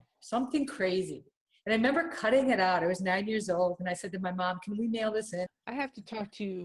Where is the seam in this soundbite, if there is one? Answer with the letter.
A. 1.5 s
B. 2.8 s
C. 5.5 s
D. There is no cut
C